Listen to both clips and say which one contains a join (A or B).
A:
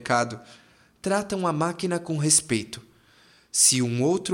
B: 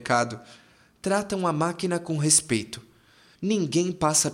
B